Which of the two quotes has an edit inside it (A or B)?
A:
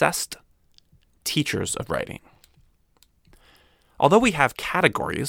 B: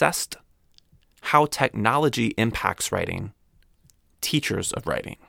A